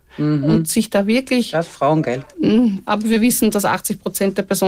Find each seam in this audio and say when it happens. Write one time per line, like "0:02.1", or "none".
0:02.8